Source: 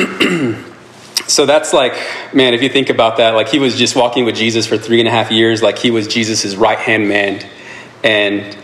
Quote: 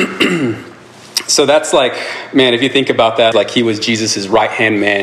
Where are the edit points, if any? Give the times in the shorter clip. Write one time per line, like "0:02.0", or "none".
0:03.3